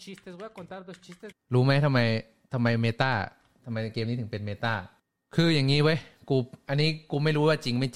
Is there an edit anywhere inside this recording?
yes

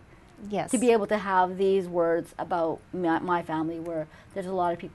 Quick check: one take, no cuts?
yes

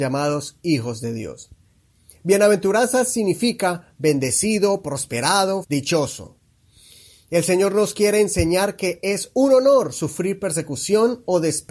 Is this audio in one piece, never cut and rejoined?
no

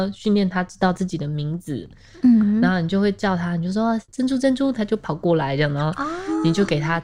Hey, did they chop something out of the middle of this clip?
no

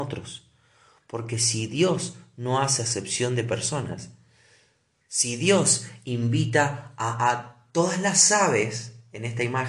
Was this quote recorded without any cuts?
yes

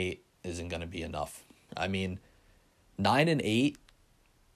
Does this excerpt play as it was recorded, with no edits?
no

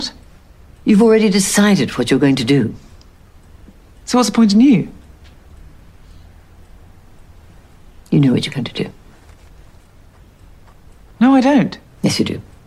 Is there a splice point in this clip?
no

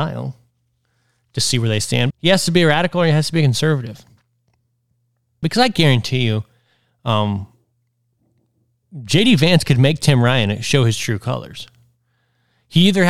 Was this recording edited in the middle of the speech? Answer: yes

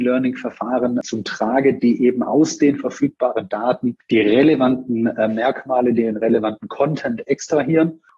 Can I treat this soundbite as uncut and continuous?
yes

